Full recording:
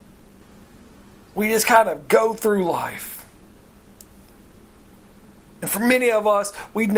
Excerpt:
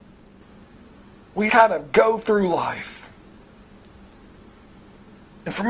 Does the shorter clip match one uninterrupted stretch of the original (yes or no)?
no